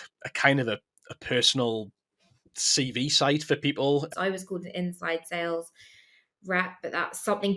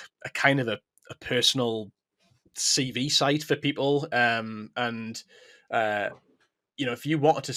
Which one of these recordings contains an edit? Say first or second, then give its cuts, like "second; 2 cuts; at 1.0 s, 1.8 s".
first; 1 cut; at 4.1 s